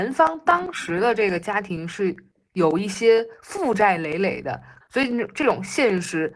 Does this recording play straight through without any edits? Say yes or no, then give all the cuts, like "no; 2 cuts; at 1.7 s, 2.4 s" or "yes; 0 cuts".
no; 1 cut; at 4.8 s